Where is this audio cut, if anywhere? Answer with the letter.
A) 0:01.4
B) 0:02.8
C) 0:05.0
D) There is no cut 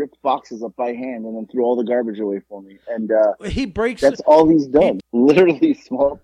C